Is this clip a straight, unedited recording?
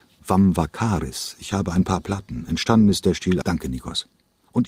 no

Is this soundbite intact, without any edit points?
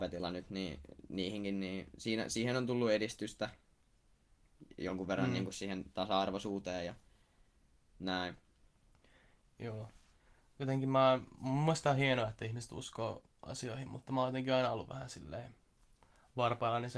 no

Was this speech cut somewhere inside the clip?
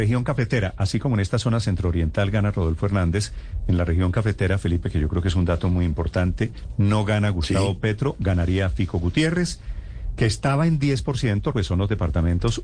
yes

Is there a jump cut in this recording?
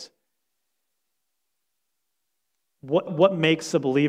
yes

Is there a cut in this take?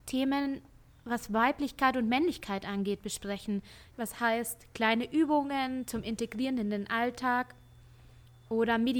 yes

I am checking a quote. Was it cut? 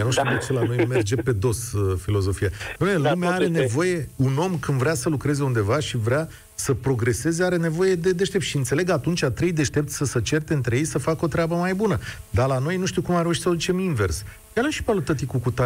no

